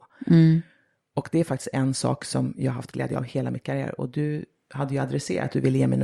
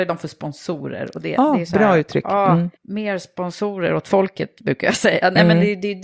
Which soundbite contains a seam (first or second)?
second